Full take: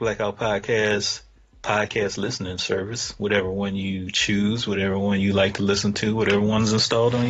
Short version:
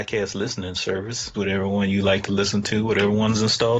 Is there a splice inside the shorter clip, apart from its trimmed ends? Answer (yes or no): yes